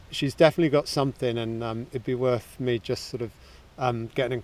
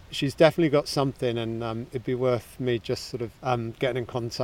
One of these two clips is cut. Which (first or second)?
second